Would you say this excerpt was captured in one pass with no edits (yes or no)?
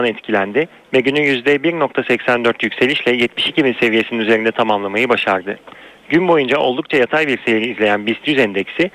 yes